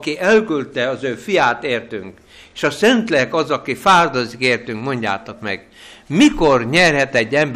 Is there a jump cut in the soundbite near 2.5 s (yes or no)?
no